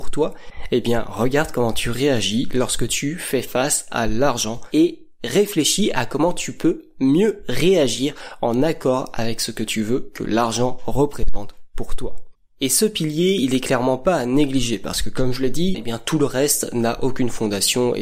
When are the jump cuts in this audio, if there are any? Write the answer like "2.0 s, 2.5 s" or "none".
15.7 s